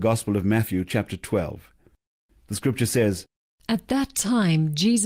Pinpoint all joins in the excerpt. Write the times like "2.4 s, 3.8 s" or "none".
none